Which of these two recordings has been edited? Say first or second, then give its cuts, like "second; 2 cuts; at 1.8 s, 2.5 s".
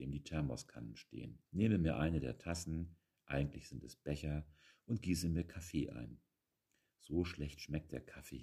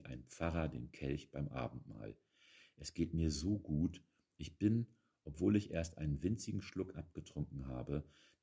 first; 1 cut; at 1.5 s